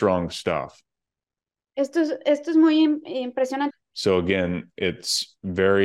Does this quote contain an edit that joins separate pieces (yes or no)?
yes